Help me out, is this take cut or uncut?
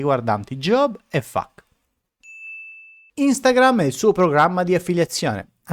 uncut